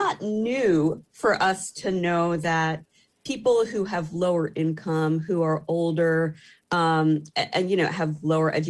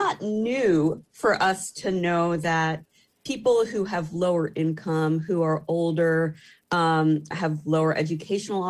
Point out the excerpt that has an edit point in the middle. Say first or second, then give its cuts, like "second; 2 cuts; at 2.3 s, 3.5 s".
second; 1 cut; at 7.3 s